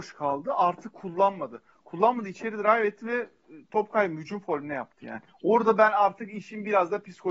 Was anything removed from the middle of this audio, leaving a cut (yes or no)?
no